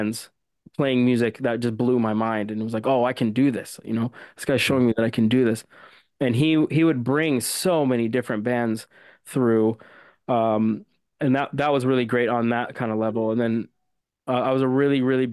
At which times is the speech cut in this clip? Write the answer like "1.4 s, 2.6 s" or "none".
none